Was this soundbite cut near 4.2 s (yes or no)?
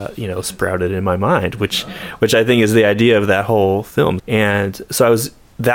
yes